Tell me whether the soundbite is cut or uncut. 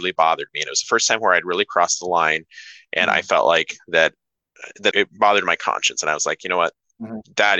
cut